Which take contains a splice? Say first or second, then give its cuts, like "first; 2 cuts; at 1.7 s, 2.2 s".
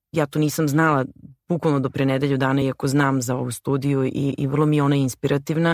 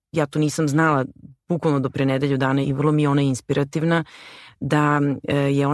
second; 1 cut; at 2.6 s